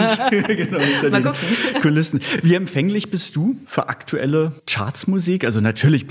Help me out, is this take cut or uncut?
uncut